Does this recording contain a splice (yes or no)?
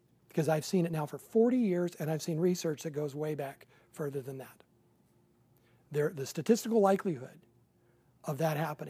no